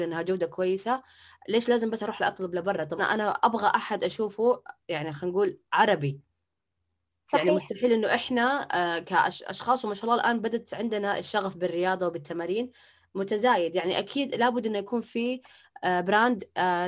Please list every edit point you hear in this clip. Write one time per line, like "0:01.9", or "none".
0:03.0